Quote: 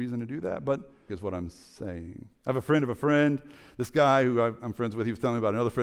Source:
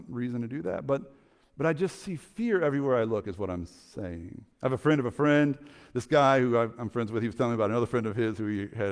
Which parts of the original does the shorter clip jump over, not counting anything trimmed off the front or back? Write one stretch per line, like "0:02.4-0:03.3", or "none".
0:01.3-0:03.2